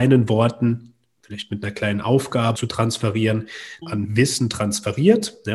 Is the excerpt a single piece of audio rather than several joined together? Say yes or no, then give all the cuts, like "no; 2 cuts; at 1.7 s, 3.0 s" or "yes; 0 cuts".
no; 2 cuts; at 2.5 s, 3.8 s